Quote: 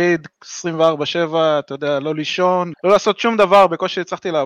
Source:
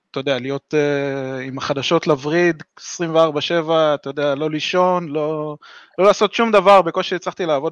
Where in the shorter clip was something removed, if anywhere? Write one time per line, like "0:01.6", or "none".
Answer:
0:02.7